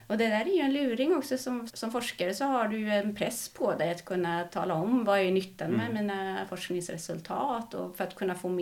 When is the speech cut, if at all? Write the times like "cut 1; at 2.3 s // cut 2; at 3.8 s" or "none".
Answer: cut 1; at 1.7 s